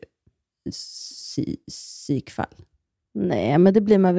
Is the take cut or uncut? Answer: uncut